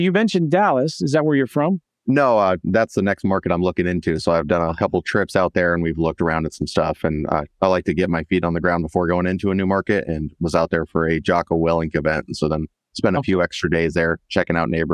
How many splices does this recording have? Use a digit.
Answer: 0